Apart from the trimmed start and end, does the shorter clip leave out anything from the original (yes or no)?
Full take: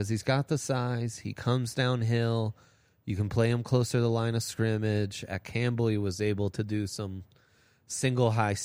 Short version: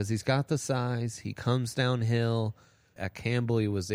yes